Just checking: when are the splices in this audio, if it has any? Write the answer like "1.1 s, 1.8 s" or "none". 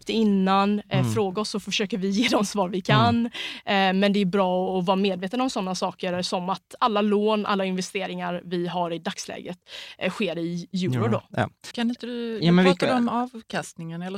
11.7 s